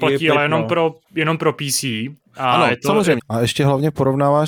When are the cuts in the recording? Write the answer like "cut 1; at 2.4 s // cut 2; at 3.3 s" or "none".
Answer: cut 1; at 3.2 s